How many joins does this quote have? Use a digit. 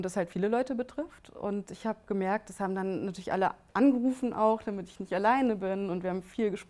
0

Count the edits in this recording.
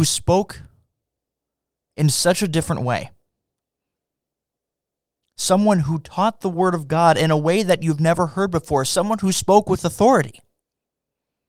0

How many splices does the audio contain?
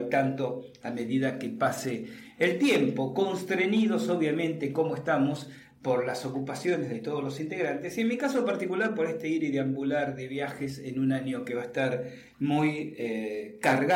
0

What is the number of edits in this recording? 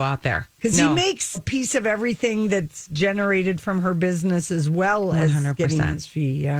1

